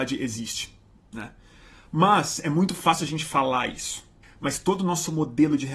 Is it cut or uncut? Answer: cut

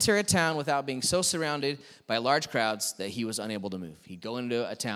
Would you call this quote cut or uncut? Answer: uncut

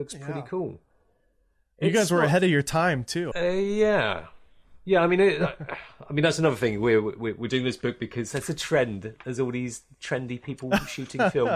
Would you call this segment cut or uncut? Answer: cut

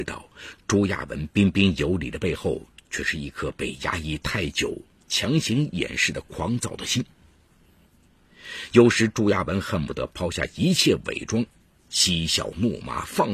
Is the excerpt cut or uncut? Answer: uncut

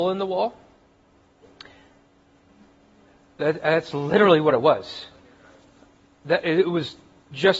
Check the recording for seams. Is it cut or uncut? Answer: uncut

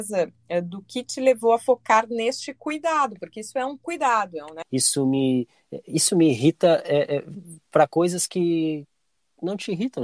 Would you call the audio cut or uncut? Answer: cut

